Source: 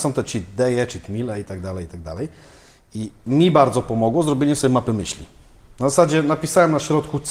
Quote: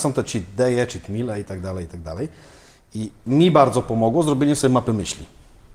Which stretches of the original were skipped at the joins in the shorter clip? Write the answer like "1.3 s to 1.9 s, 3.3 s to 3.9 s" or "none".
none

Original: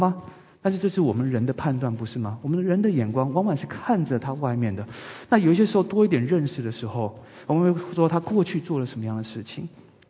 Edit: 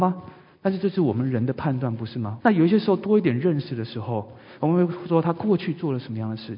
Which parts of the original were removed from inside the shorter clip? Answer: 2.4 s to 5.3 s

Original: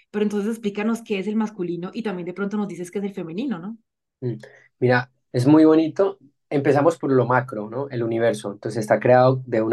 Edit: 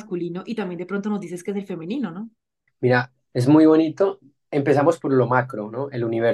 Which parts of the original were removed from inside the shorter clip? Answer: 4.2 s to 4.7 s

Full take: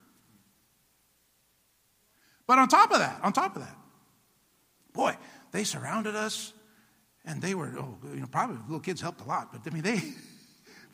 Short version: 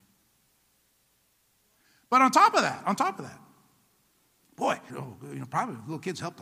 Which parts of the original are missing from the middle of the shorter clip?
5.3 s to 7.7 s

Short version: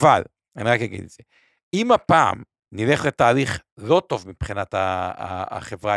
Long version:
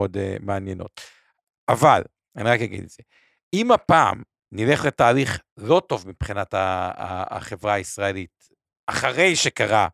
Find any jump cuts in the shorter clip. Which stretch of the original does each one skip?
none

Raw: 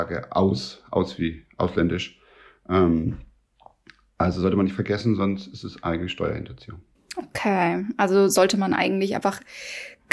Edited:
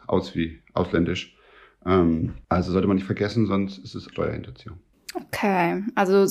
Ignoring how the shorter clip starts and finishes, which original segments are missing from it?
3.3 s to 4.1 s, 5.8 s to 6.1 s

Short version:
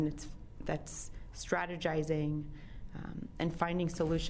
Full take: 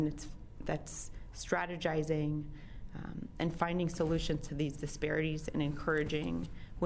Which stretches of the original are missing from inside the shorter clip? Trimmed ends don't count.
none

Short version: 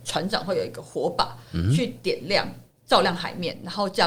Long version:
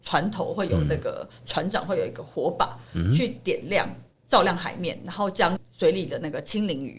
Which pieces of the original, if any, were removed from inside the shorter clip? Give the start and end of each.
none

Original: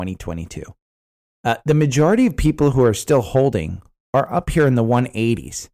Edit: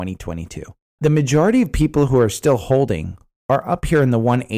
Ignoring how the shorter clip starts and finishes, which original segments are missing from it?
1.0 s to 1.6 s

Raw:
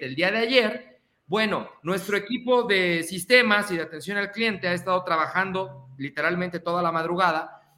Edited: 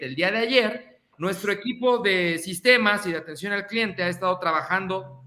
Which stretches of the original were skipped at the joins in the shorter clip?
1.1 s to 1.8 s

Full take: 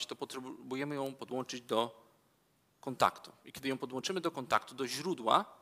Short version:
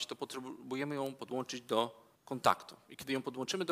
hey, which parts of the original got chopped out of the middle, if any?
2.2 s to 2.7 s

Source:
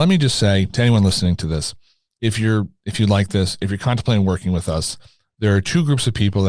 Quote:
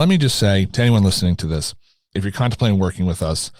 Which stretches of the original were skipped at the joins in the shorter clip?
2.1 s to 3.6 s

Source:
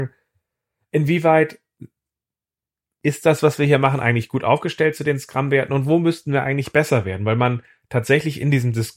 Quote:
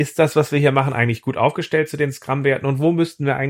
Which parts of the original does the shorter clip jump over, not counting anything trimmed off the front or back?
none

